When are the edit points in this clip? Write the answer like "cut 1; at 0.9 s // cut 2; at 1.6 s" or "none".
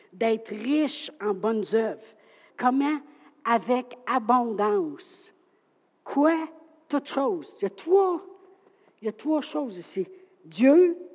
cut 1; at 2.5 s

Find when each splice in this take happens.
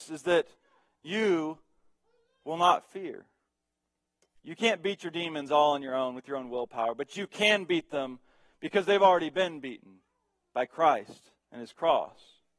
cut 1; at 4.4 s

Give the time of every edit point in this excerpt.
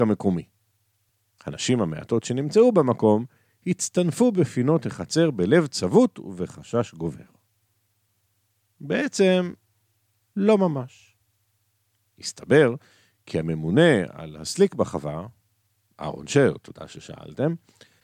cut 1; at 1.4 s

